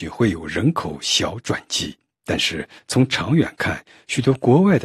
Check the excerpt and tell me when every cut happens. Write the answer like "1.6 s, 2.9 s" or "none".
none